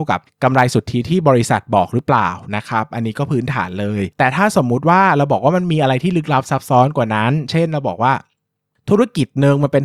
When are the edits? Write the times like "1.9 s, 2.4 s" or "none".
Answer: none